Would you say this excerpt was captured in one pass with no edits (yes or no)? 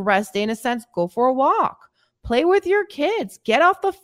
yes